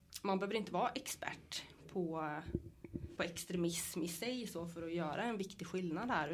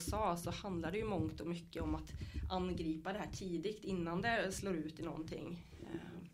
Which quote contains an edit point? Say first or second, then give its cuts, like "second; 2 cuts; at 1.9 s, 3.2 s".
first; 1 cut; at 3.2 s